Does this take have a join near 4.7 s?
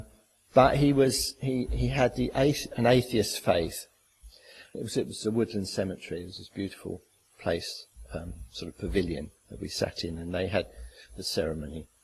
yes; 1 cut; at 4.7 s

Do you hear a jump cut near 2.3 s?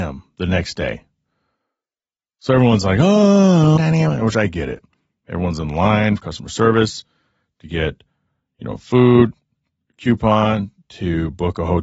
no; 1 cut; at 3.8 s

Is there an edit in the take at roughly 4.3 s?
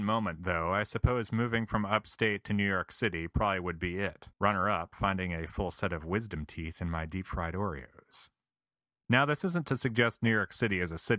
yes; 1 cut; at 4.3 s

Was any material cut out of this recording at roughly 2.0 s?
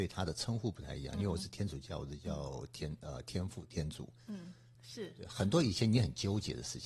no; 1 cut; at 4.7 s

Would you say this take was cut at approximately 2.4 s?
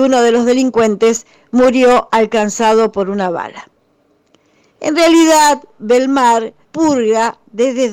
no; 2 cuts; at 4.7 s, 6.6 s

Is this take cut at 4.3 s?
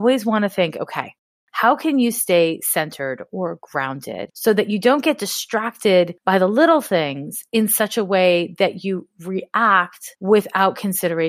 yes; 1 cut; at 4.3 s

